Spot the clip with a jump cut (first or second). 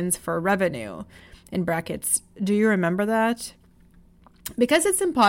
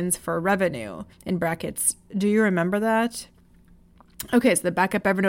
second